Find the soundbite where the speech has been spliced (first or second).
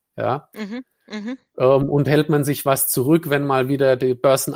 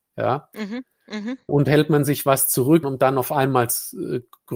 second